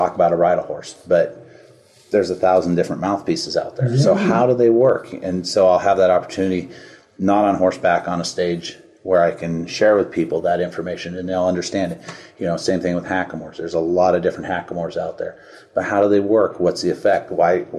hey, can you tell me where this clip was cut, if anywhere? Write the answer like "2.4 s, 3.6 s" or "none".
none